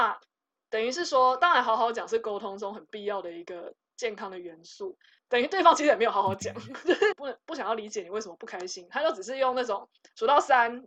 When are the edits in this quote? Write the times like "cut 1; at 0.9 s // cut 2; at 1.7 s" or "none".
cut 1; at 5.2 s // cut 2; at 7.1 s